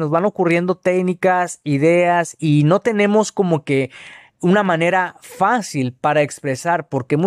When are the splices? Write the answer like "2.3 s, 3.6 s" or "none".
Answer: 2.4 s